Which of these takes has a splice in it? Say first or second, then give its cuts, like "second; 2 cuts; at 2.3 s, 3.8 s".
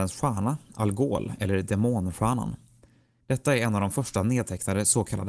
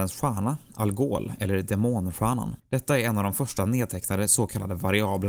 second; 1 cut; at 2.6 s